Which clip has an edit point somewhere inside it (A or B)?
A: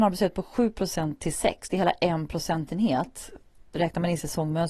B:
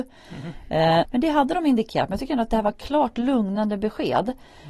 B